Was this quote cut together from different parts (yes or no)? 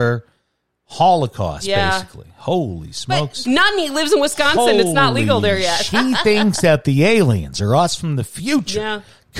yes